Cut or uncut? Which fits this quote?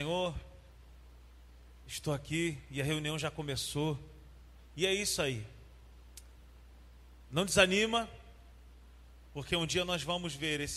uncut